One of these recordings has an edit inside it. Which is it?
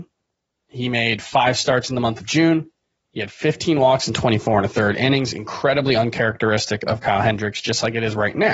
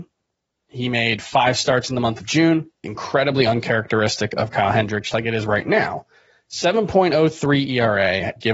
second; 2 cuts; at 2.8 s, 5.1 s

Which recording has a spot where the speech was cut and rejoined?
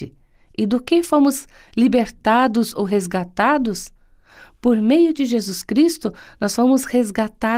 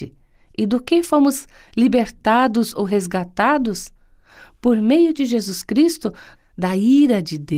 second; 1 cut; at 6.4 s

